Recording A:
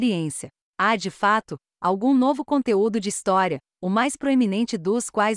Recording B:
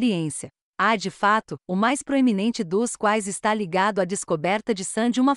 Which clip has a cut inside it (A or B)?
B